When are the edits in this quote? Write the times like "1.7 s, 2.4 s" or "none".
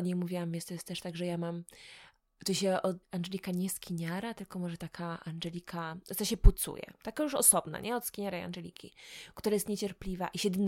3.0 s